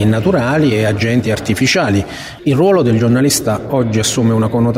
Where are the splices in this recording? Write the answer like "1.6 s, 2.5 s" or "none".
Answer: 2.4 s